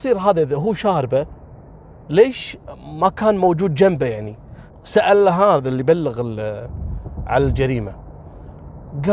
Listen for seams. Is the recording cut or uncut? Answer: cut